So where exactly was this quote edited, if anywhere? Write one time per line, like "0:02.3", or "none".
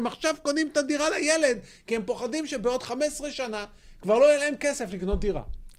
none